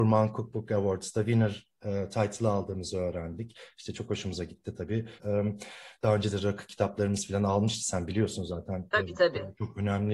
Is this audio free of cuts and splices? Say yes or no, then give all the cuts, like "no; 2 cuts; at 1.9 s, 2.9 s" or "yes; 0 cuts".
no; 1 cut; at 5.2 s